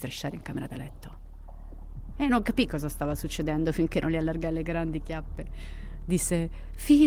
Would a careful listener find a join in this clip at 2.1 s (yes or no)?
yes